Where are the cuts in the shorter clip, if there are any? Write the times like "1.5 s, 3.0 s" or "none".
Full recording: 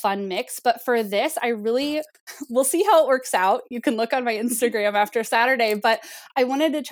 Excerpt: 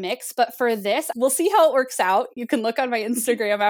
1.1 s